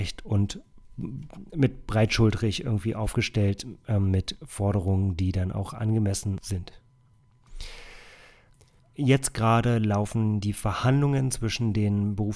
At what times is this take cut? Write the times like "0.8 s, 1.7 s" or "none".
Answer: 8.8 s